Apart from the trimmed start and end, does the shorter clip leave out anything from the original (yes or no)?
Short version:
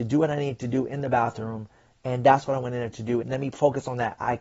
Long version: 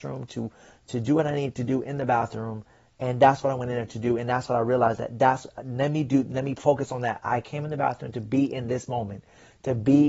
yes